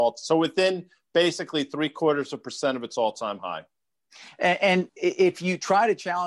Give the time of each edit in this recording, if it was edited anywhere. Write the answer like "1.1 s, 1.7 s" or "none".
4.9 s